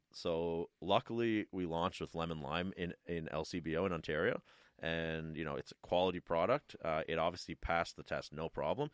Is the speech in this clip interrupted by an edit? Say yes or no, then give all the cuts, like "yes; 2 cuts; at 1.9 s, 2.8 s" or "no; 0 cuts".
no; 0 cuts